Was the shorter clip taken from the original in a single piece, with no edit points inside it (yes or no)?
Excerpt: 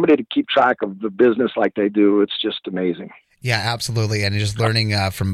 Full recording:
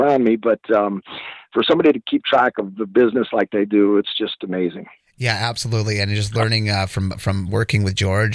yes